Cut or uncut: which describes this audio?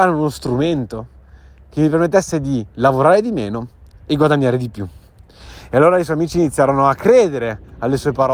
uncut